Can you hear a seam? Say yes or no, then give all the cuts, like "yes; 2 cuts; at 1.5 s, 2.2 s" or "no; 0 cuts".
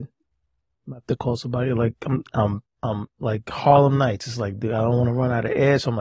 yes; 1 cut; at 2.7 s